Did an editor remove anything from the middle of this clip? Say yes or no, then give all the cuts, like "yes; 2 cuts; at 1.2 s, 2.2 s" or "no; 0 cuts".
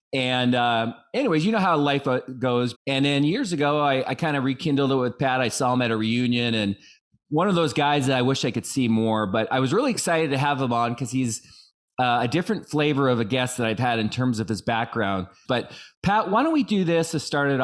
yes; 2 cuts; at 2.7 s, 15.4 s